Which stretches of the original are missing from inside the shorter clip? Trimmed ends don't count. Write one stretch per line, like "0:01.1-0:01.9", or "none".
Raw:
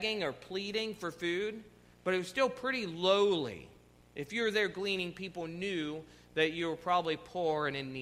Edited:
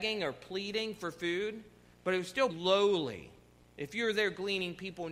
0:02.5-0:02.9